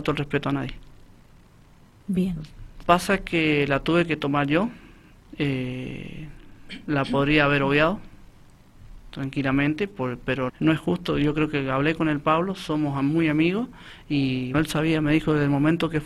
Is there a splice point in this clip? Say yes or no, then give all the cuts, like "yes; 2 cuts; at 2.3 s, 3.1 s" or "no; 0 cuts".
yes; 3 cuts; at 2.8 s, 10.5 s, 14.5 s